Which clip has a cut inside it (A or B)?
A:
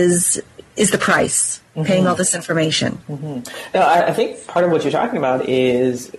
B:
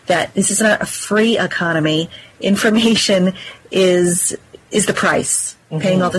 A